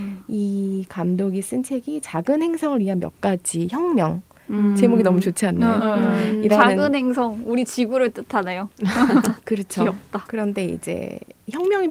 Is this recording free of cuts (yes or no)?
yes